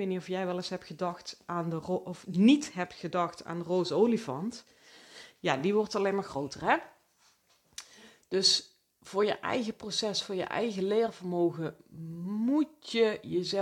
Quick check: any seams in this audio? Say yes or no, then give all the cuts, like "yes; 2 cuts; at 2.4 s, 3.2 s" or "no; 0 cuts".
no; 0 cuts